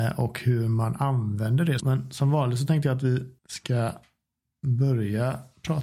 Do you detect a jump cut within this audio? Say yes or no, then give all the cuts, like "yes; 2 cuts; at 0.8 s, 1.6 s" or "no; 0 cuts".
yes; 2 cuts; at 1.8 s, 3.4 s